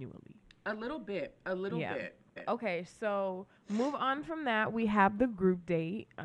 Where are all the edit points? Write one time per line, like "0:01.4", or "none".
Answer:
0:02.4
0:03.6